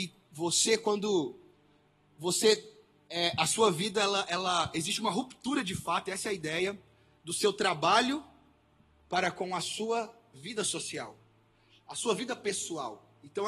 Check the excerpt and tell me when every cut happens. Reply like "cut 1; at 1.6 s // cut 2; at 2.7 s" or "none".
none